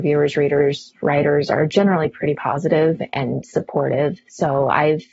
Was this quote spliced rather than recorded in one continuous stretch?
no; 0 cuts

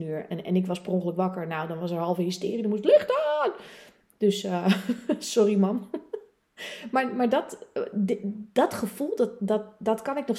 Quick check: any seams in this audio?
no; 0 cuts

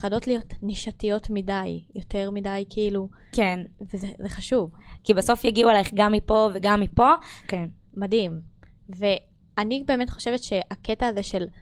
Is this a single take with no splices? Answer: no; 2 cuts; at 5.0 s, 7.4 s

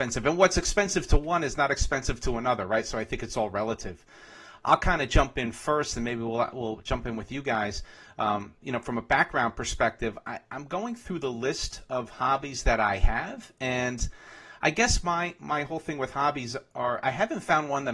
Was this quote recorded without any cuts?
yes; 0 cuts

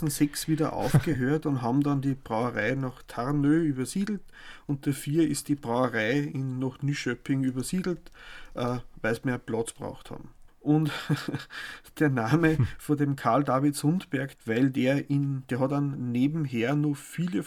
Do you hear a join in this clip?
yes; 2 cuts; at 10.5 s, 14.4 s

